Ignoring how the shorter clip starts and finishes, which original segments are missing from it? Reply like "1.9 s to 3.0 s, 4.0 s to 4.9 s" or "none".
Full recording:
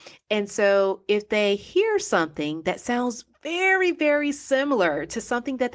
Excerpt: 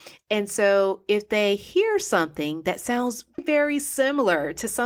3.4 s to 3.9 s